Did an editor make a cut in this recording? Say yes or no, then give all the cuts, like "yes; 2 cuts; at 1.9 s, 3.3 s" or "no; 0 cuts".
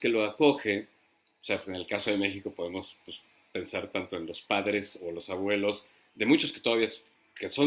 no; 0 cuts